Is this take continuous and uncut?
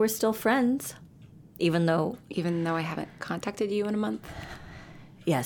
yes; 0 cuts

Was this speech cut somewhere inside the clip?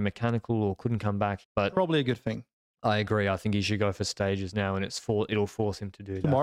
yes; 1 cut; at 1.4 s

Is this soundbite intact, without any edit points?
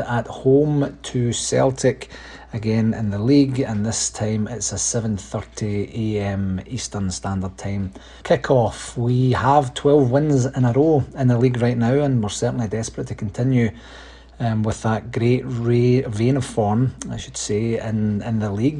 no; 1 cut; at 8.2 s

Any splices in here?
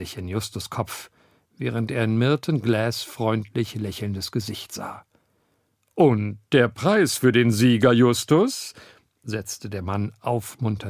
no; 0 cuts

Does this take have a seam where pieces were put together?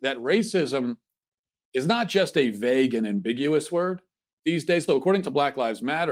yes; 1 cut; at 4.9 s

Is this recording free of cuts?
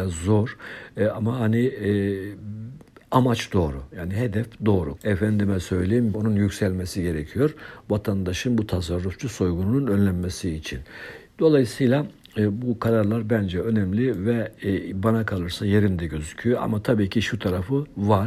no; 2 cuts; at 5.0 s, 6.1 s

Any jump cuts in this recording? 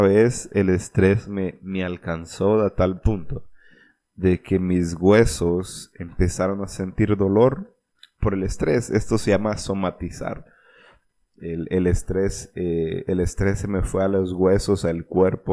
no; 0 cuts

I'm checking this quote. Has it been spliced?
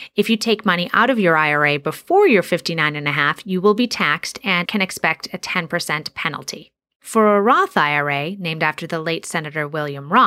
yes; 1 cut; at 4.6 s

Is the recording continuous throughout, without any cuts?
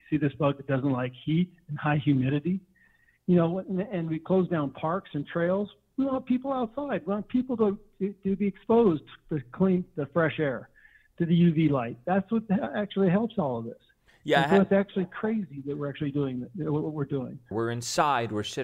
no; 1 cut; at 17.5 s

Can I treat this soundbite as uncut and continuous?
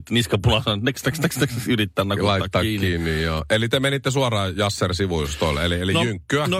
yes; 0 cuts

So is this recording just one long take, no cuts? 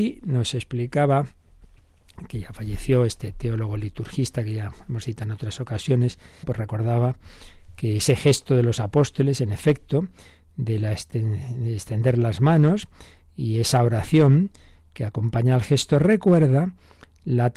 no; 1 cut; at 6.4 s

